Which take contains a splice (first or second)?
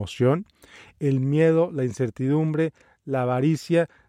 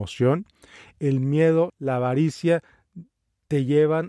second